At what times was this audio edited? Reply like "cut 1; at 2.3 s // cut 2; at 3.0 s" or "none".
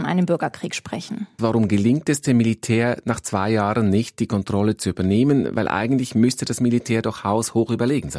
cut 1; at 1.4 s